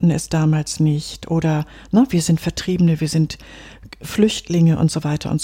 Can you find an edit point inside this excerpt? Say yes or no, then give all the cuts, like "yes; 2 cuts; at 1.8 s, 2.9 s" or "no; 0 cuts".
no; 0 cuts